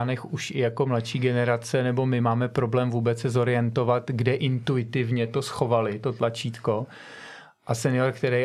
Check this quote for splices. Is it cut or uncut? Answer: uncut